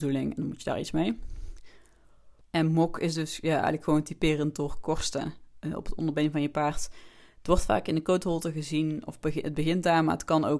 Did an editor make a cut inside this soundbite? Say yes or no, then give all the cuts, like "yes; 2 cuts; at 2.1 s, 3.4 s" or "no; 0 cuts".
no; 0 cuts